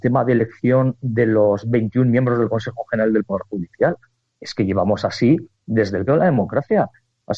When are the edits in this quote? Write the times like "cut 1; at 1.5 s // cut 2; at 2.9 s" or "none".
cut 1; at 6.1 s